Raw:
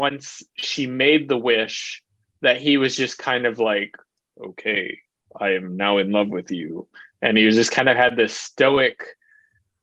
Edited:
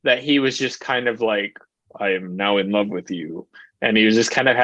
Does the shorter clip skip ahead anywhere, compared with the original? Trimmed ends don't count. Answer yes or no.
yes